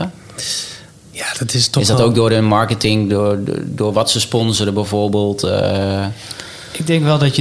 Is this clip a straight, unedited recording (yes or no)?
yes